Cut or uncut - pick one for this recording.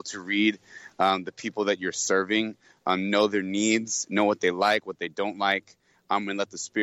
uncut